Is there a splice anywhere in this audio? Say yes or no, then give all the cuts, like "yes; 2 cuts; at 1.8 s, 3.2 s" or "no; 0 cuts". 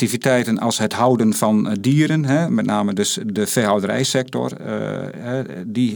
no; 0 cuts